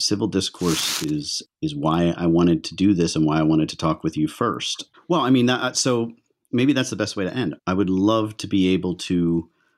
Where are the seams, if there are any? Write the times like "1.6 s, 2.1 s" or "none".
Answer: 1.4 s, 4.9 s, 7.6 s